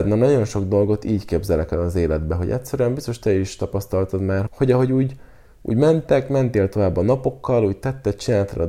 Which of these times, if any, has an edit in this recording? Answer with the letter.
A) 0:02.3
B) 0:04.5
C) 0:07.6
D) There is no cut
B